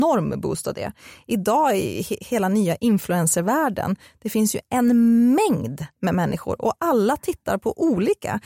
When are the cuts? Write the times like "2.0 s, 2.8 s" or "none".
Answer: none